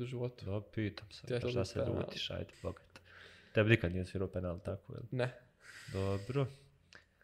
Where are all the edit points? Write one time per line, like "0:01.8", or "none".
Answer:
0:01.4
0:02.5

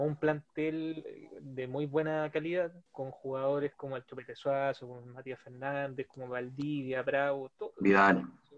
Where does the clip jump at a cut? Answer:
0:02.9

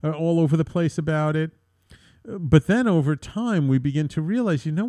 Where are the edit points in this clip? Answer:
none

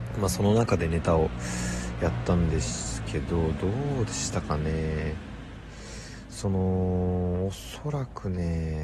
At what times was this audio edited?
none

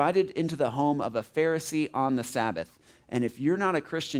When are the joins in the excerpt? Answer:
none

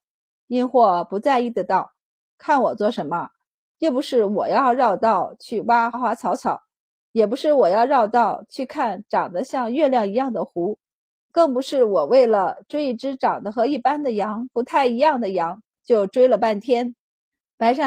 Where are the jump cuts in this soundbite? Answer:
0:05.9

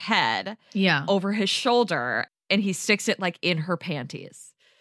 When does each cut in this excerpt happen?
0:02.3

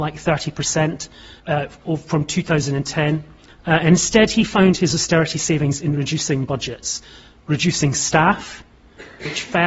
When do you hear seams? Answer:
0:01.4
0:03.5

